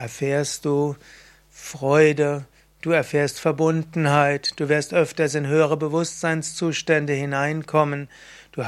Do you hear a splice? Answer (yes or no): no